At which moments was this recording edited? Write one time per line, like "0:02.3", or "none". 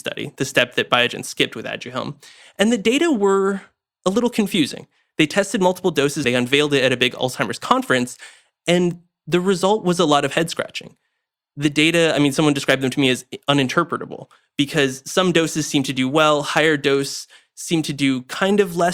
0:06.2